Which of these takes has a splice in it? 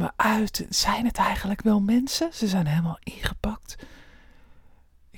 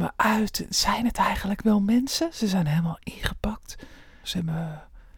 second; 1 cut; at 4.2 s

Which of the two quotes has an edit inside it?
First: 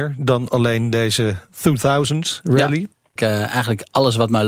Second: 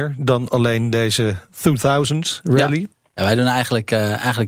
first; 1 cut; at 3.2 s

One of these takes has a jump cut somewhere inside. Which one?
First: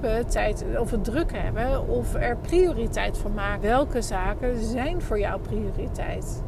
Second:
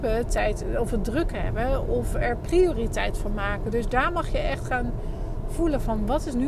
first; 1 cut; at 3.6 s

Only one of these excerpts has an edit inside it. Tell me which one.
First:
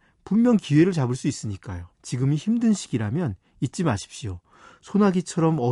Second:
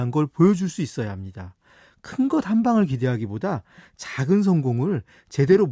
first; 1 cut; at 1.9 s

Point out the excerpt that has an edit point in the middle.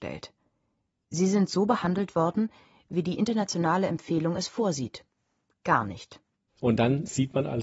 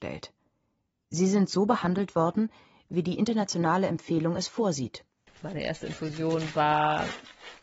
second; 1 cut; at 5.3 s

